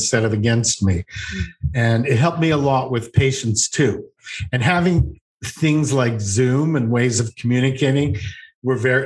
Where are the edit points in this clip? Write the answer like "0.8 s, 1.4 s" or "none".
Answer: none